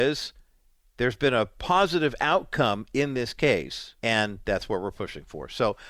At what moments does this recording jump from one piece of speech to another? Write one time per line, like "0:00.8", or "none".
0:04.0